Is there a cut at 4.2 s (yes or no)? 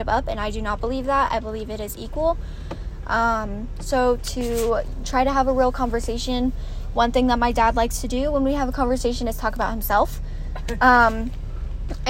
yes